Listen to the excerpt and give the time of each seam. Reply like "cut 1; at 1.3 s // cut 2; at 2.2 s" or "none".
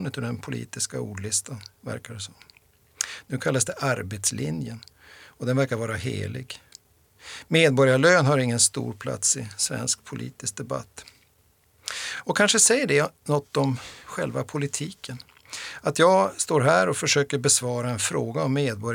none